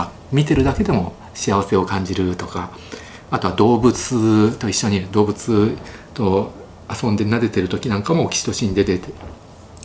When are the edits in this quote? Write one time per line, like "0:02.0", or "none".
none

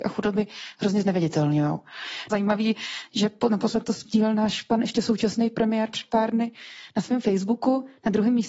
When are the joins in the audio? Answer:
0:02.3

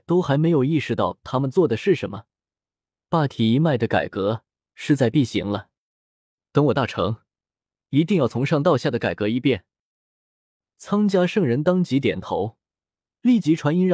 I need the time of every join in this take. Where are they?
0:07.8
0:10.2

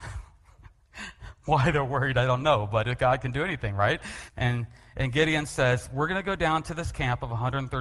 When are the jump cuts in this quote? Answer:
0:04.3

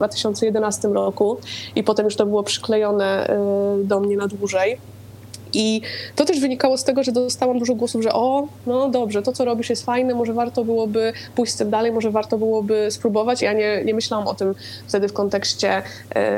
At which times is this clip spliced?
0:13.4

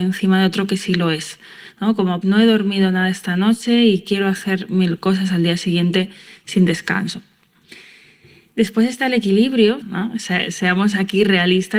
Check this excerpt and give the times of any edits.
0:02.2
0:09.8

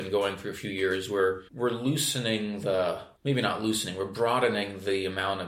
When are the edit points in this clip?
0:01.5
0:03.2

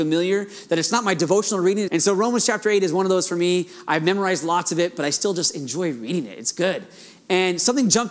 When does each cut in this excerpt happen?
0:01.9

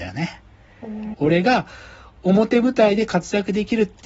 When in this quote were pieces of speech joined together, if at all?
0:01.1

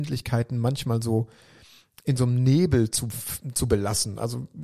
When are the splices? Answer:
none

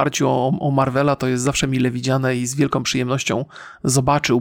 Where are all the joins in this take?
none

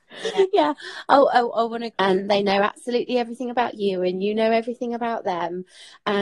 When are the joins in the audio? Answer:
0:01.9

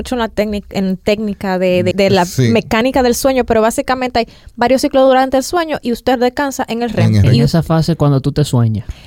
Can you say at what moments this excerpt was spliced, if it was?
0:01.9

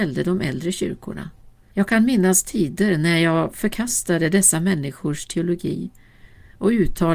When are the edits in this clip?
0:01.7

